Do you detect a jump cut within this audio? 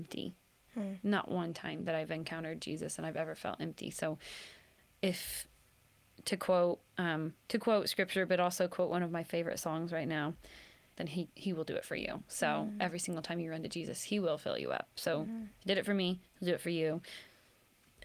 yes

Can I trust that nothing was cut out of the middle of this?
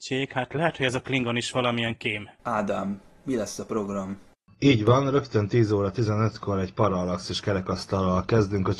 no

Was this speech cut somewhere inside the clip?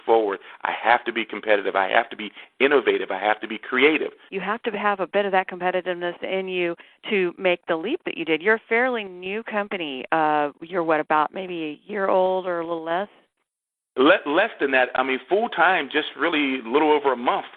yes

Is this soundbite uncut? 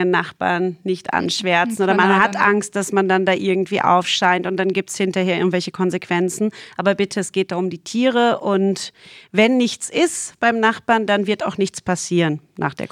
yes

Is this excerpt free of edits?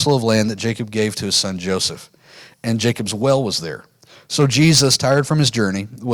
yes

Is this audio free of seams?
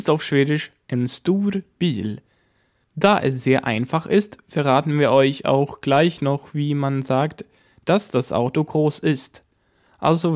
yes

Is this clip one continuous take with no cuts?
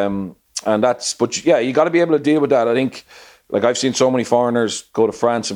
yes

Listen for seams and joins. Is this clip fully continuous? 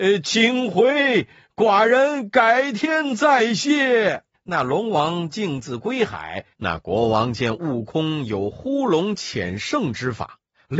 no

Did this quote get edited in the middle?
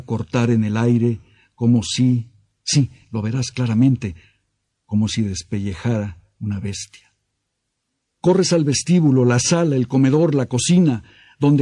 no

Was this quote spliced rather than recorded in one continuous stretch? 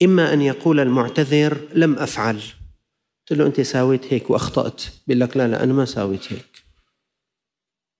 no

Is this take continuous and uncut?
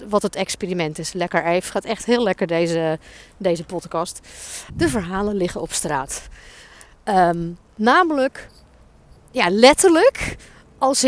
no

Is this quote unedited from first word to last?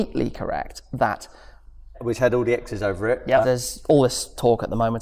no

